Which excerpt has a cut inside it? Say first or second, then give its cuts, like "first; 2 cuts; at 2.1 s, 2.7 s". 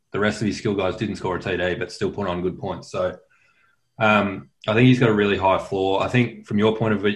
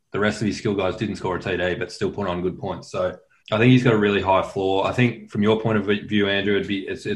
second; 1 cut; at 3.4 s